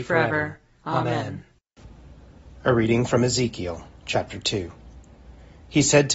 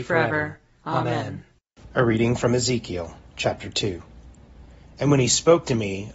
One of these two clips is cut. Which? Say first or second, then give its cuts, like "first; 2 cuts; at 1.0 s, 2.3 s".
second; 2 cuts; at 1.9 s, 4.8 s